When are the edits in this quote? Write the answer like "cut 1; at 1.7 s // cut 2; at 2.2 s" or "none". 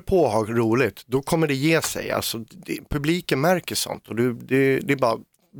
none